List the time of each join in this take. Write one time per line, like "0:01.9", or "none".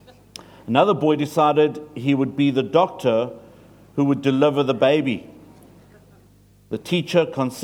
none